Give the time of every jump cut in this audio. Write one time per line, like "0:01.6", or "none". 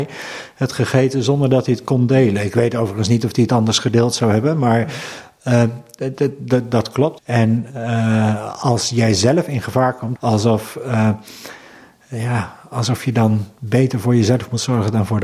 0:07.2
0:10.2